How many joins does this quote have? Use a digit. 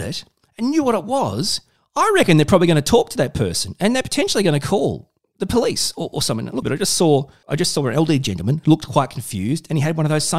1